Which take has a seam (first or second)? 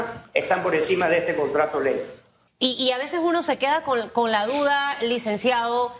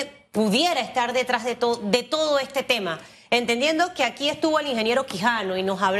first